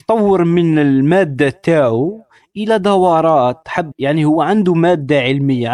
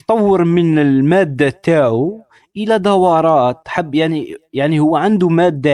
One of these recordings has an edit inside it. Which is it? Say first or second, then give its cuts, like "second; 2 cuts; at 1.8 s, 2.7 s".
first; 1 cut; at 3.9 s